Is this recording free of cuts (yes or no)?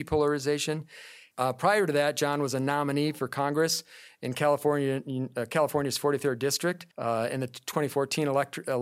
no